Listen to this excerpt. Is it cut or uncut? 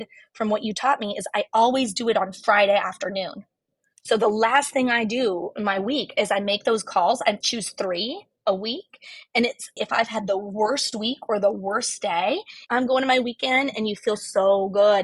cut